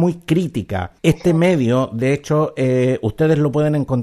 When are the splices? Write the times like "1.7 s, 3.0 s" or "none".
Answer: 1.0 s